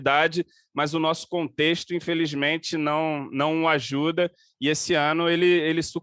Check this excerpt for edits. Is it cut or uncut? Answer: uncut